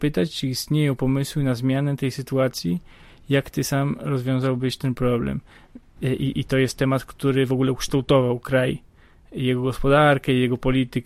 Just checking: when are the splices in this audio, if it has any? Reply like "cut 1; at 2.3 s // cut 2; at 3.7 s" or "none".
cut 1; at 6.0 s